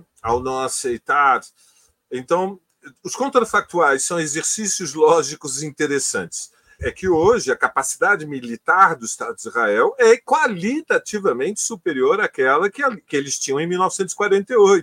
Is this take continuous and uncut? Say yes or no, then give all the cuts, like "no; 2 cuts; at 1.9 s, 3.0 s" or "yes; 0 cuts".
no; 2 cuts; at 2.1 s, 6.8 s